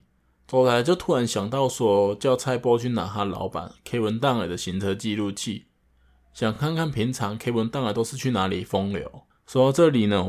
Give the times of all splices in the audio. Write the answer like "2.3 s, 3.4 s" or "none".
none